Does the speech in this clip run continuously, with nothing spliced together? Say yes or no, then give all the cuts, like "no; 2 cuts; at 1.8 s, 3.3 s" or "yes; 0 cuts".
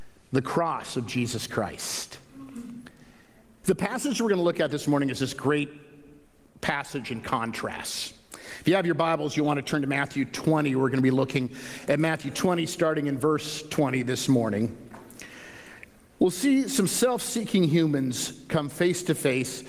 no; 1 cut; at 3.6 s